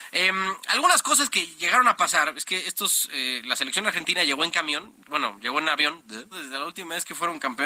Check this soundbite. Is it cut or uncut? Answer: cut